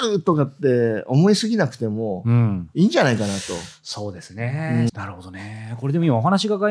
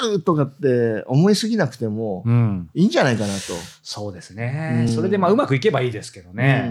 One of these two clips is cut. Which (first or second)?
first